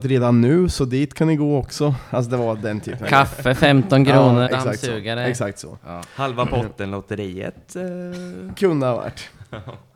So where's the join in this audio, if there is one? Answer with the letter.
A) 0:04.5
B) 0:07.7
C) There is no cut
A